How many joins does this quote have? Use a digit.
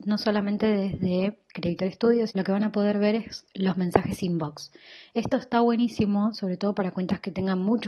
1